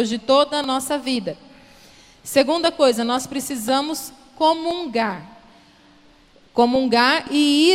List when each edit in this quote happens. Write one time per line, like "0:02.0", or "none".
none